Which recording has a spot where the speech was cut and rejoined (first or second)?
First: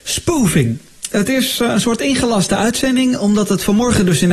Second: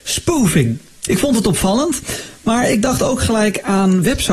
second